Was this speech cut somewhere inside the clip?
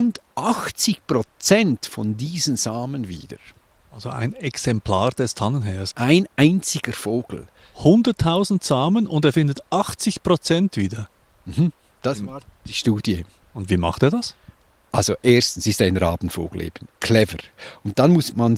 no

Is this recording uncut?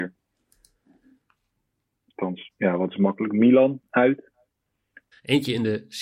no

